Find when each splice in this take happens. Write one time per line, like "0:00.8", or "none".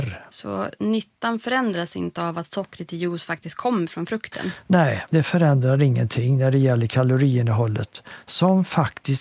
none